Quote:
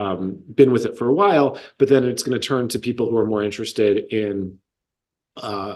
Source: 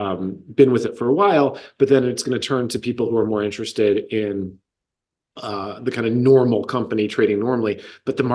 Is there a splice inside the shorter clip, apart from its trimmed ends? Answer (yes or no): no